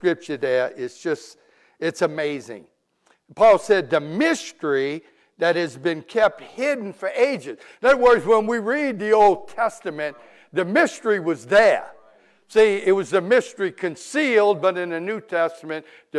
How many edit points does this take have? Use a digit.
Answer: 0